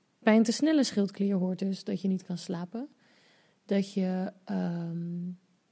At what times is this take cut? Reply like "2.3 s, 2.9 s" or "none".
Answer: none